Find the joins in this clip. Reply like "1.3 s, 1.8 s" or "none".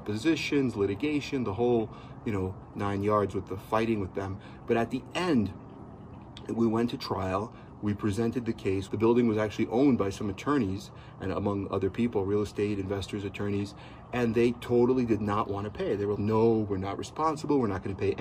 8.9 s, 16.1 s